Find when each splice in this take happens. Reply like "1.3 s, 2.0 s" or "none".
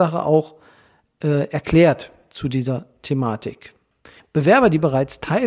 4.2 s